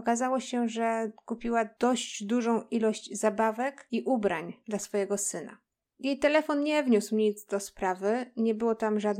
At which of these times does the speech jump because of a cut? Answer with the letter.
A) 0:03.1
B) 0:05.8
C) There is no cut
B